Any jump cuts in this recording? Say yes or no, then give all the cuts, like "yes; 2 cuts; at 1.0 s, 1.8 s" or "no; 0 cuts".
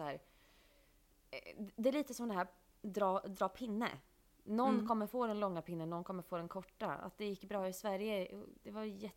no; 0 cuts